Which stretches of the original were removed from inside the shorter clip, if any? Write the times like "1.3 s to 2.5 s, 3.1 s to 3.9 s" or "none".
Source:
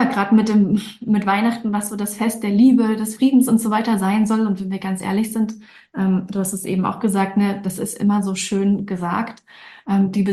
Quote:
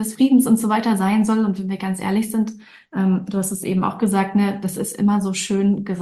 none